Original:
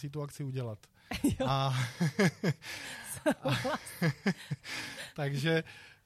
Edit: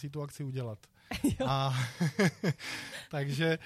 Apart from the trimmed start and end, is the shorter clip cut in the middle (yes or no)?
yes